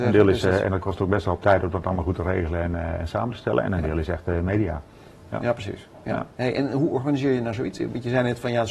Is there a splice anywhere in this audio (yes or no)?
no